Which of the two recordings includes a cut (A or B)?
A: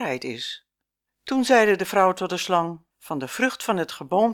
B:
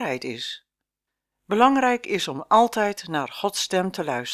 A